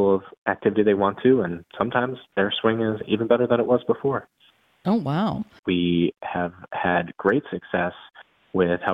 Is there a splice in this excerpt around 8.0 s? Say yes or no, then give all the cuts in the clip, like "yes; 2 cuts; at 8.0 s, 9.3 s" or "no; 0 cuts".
no; 1 cut; at 5.6 s